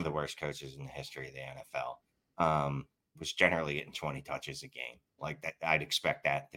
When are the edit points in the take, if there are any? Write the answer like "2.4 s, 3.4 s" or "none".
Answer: none